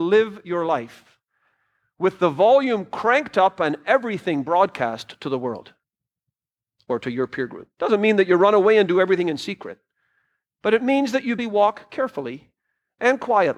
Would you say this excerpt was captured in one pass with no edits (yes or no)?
no